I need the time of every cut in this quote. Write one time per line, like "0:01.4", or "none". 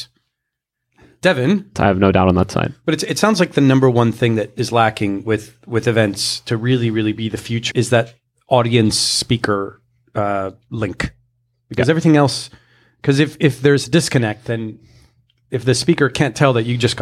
0:01.7
0:07.7